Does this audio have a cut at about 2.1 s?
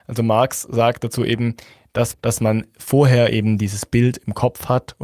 yes; 1 cut; at 2.1 s

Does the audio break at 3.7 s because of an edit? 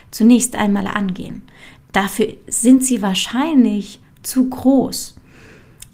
no; 1 cut; at 1.9 s

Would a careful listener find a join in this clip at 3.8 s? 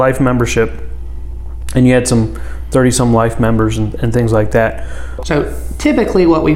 no; 1 cut; at 5.2 s

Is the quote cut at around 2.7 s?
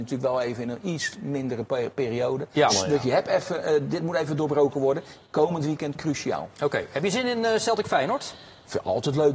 yes; 1 cut; at 2.7 s

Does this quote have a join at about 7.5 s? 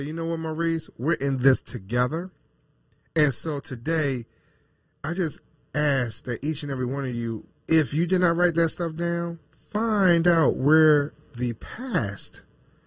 yes; 2 cuts; at 7.5 s, 9.5 s

